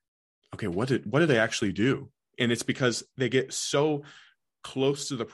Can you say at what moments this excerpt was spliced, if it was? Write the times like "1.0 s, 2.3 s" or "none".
none